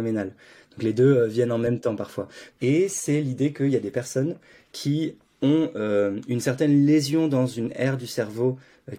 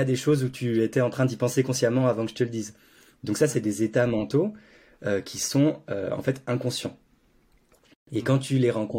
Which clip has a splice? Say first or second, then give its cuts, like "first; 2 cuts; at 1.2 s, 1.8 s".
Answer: first; 1 cut; at 2.5 s